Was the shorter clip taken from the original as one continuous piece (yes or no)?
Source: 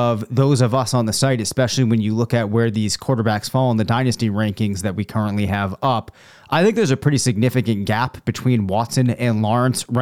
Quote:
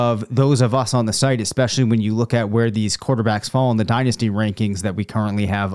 yes